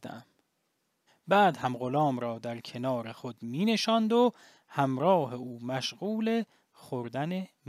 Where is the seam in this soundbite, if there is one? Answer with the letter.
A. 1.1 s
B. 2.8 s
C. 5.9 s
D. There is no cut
A